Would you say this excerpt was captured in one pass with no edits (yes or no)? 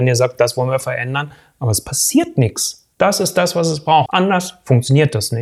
no